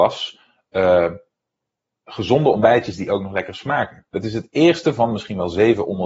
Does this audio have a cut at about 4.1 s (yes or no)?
yes